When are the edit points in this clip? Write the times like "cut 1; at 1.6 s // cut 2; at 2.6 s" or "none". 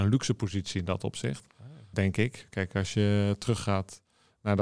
cut 1; at 1.9 s